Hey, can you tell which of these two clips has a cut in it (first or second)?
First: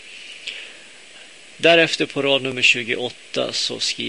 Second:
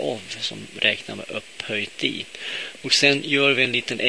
second